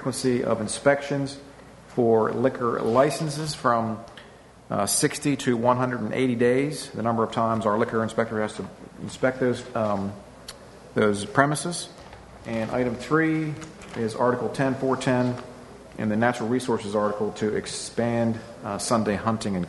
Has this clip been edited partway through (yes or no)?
no